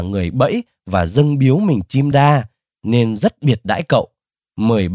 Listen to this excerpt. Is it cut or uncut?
cut